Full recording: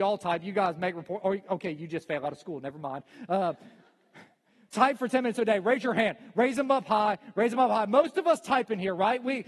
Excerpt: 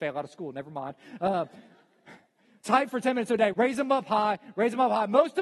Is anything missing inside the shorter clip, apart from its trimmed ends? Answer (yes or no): yes